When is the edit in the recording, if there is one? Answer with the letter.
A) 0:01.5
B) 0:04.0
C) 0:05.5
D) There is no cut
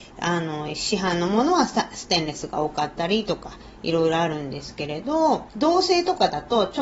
C